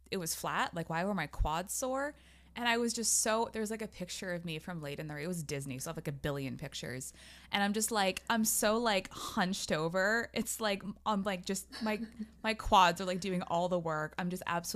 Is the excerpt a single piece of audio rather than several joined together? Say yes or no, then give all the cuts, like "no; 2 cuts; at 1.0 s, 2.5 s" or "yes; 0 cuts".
yes; 0 cuts